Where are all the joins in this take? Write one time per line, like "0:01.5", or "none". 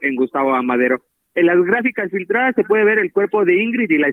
none